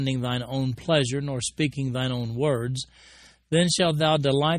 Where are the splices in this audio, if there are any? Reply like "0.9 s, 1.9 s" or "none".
none